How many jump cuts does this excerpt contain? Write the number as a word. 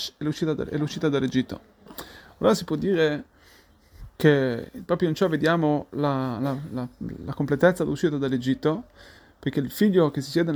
zero